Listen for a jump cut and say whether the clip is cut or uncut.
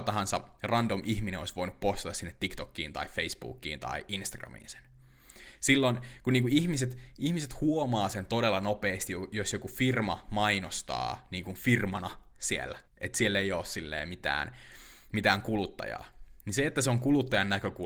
cut